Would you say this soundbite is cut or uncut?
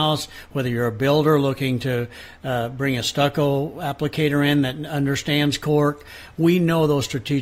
uncut